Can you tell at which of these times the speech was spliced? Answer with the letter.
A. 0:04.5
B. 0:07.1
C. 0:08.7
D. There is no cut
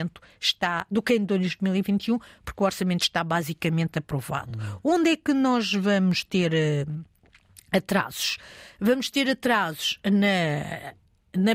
D